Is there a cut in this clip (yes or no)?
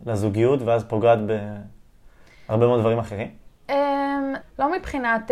yes